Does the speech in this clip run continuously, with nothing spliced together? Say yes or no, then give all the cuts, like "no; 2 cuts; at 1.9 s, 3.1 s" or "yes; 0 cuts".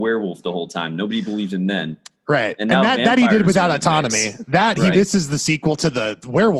no; 1 cut; at 4.9 s